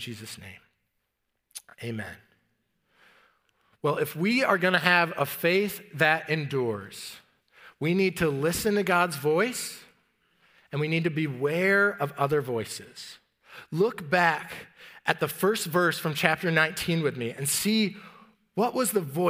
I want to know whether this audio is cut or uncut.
uncut